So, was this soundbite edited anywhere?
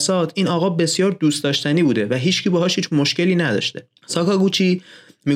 yes; 1 cut; at 4.0 s

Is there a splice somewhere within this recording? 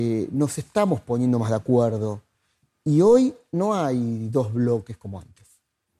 no; 0 cuts

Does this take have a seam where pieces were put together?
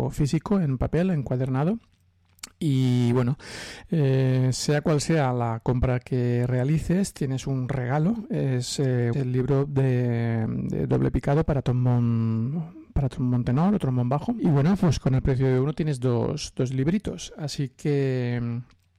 yes; 2 cuts; at 9.1 s, 14.4 s

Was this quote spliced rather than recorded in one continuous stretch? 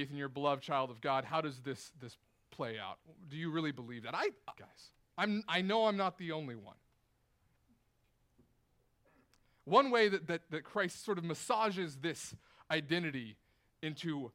yes; 1 cut; at 4.5 s

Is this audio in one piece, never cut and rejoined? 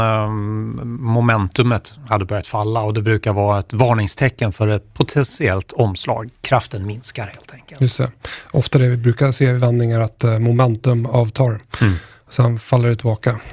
yes; 0 cuts

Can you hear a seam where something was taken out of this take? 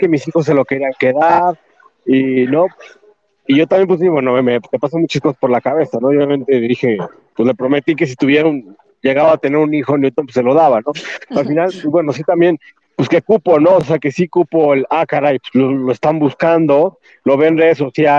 no; 0 cuts

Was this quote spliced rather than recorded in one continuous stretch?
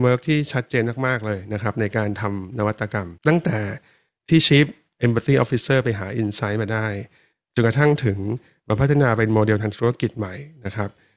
yes; 1 cut; at 3.2 s

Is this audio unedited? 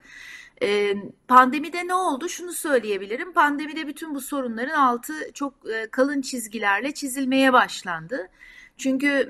yes; 0 cuts

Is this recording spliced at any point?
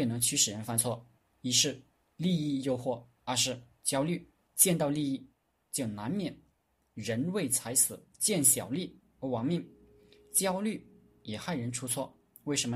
yes; 2 cuts; at 4.5 s, 8.1 s

